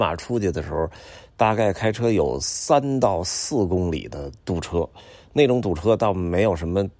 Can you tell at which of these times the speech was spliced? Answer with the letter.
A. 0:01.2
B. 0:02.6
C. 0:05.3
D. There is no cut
D